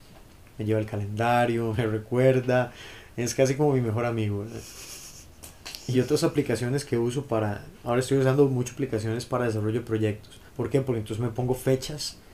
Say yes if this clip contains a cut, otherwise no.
yes